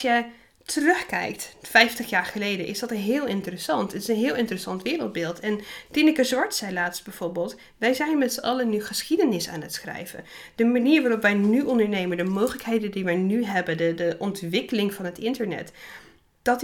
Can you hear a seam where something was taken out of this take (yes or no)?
no